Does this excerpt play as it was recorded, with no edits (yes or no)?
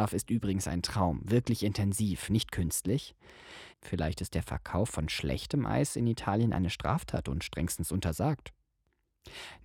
no